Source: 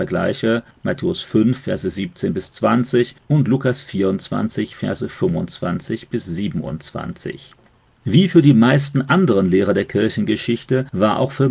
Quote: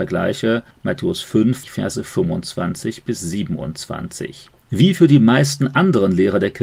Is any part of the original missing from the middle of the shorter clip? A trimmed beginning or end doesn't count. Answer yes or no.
yes